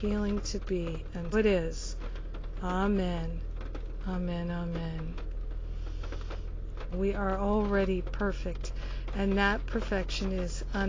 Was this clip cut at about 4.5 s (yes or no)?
no